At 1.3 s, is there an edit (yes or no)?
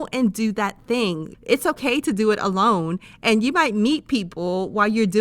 yes